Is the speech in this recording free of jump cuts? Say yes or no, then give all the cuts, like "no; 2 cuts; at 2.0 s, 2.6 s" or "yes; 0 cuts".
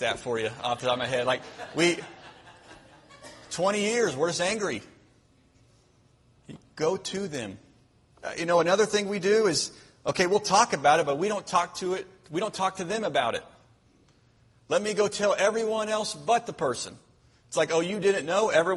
yes; 0 cuts